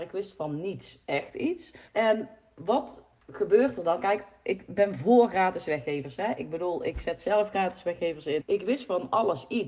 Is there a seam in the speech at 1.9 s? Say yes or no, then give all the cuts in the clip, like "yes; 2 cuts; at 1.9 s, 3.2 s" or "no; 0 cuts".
yes; 2 cuts; at 1.9 s, 8.4 s